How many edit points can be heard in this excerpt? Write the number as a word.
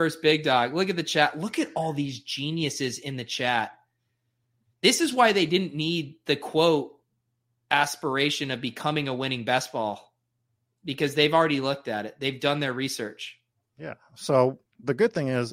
zero